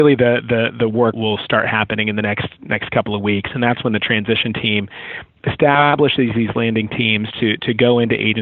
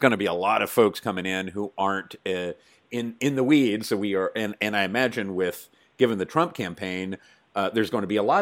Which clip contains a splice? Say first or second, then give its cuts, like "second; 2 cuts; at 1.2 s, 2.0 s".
first; 1 cut; at 1.1 s